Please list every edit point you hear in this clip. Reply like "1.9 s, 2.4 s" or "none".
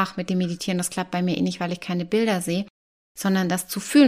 none